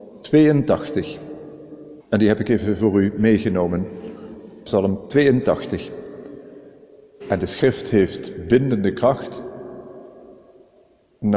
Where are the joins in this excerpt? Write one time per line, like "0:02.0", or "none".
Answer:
0:02.0
0:07.2